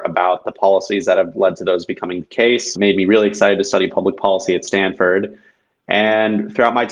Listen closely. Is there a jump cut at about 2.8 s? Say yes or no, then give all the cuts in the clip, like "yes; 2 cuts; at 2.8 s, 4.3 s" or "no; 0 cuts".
yes; 1 cut; at 2.8 s